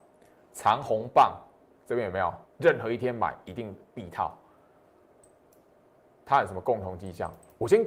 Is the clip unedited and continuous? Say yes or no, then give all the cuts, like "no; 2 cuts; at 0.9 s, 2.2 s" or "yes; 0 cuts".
no; 1 cut; at 2.5 s